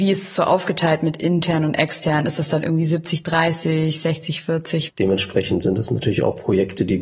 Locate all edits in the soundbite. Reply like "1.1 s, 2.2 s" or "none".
4.9 s